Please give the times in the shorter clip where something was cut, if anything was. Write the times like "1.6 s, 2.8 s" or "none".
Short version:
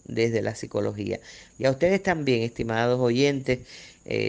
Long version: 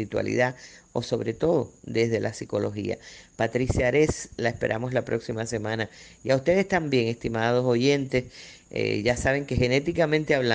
1.5 s